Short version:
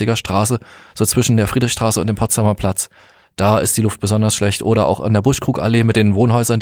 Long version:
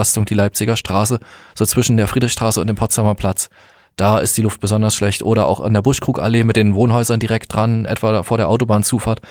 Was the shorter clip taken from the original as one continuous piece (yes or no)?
yes